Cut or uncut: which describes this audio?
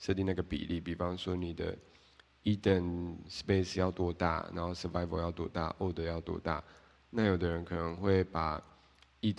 uncut